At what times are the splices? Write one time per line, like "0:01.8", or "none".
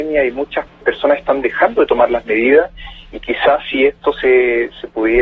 none